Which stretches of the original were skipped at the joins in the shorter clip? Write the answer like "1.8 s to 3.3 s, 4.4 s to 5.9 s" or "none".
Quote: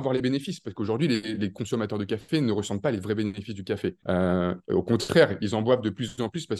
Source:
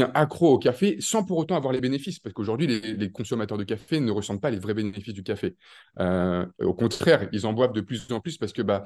5.6 s to 5.9 s